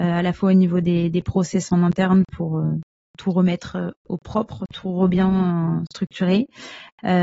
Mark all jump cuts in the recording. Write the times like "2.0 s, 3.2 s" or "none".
none